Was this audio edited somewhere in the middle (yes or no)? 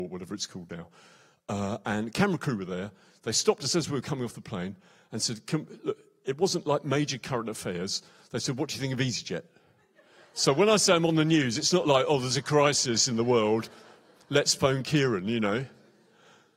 no